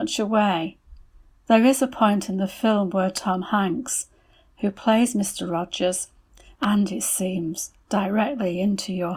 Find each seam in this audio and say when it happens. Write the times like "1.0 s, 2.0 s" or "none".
6.5 s